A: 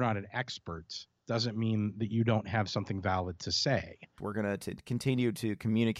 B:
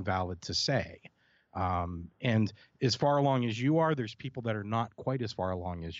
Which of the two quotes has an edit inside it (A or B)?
A